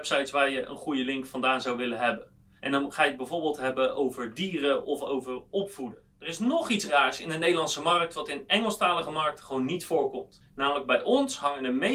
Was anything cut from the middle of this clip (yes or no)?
yes